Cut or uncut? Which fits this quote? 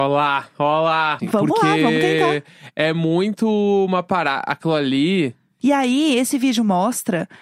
cut